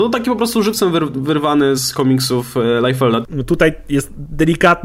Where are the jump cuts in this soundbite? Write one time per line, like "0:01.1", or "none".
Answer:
0:01.8
0:03.2